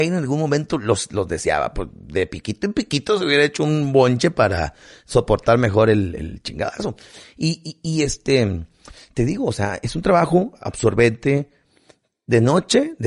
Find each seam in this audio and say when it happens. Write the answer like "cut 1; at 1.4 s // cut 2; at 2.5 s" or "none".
none